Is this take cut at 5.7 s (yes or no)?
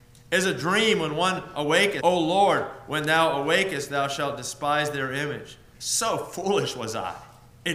yes